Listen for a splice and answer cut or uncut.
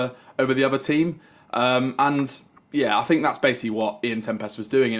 uncut